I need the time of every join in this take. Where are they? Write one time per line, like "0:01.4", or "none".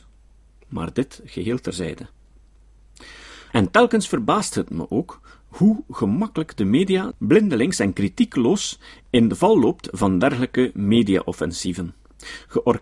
0:03.5
0:07.1